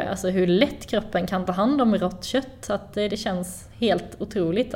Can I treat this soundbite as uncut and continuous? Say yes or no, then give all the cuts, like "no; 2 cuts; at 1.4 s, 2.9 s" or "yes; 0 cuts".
no; 1 cut; at 3.1 s